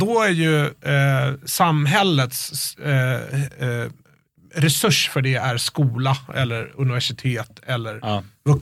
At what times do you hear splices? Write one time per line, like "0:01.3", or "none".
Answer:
none